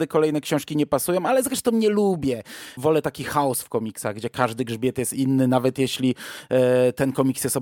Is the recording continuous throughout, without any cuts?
no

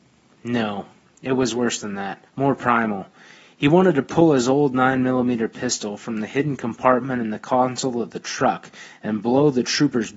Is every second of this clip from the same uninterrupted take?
no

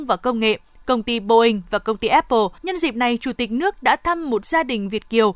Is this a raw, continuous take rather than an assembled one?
no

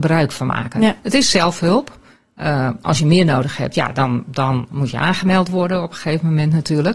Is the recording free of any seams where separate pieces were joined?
yes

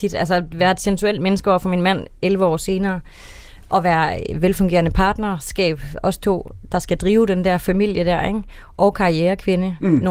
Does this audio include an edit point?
no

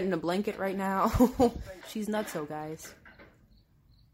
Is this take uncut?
no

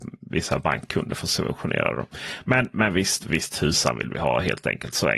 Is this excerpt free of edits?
yes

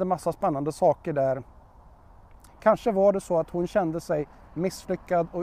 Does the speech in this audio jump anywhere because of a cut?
yes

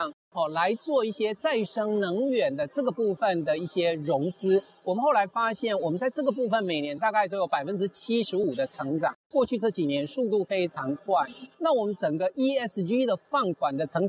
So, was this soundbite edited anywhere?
no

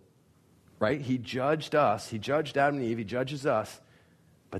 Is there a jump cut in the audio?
no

